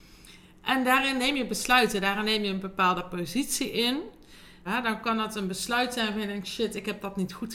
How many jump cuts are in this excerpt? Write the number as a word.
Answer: one